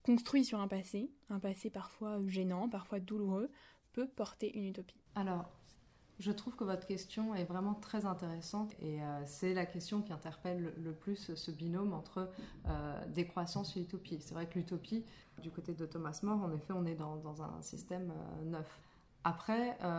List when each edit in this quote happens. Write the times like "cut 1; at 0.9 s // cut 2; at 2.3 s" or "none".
cut 1; at 5.1 s // cut 2; at 15.4 s